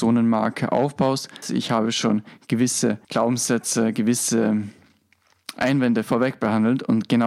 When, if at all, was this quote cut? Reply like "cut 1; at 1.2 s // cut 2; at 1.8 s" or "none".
cut 1; at 1.4 s // cut 2; at 3.0 s